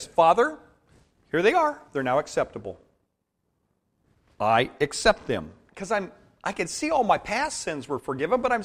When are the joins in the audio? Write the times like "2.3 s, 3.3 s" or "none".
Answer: 5.7 s